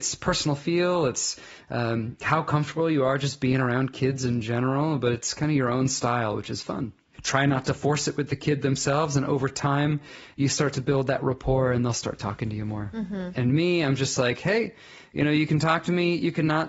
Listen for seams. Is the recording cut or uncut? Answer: cut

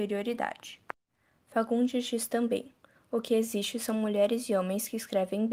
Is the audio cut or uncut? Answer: uncut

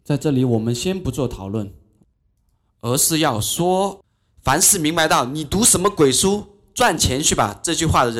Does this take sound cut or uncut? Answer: uncut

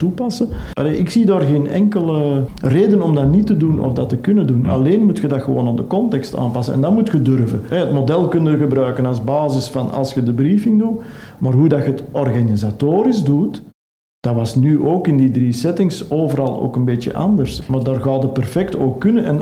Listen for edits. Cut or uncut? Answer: uncut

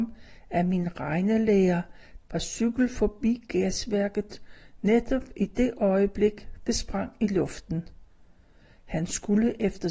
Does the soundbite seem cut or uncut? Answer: cut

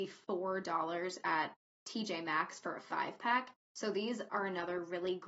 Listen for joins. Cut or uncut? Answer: uncut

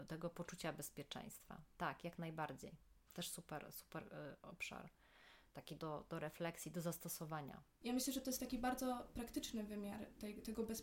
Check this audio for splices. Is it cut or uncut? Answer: cut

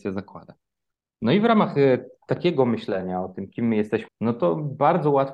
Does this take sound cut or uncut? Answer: cut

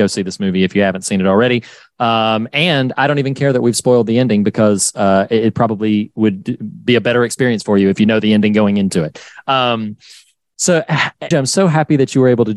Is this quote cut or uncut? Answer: cut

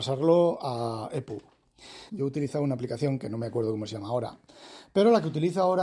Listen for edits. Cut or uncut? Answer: cut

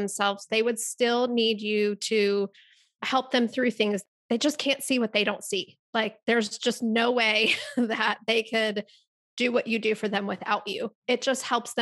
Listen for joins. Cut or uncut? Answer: uncut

